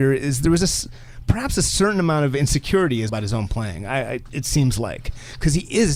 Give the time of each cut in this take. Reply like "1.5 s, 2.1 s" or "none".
3.1 s, 4.3 s